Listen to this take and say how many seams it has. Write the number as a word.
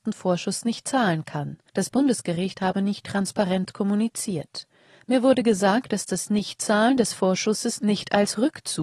one